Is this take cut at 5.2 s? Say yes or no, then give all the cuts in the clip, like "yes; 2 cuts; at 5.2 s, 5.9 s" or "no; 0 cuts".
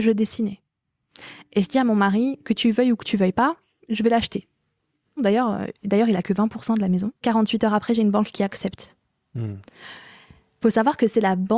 yes; 2 cuts; at 5.2 s, 7.2 s